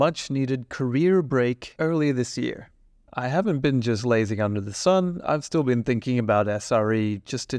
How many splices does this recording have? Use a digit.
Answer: 0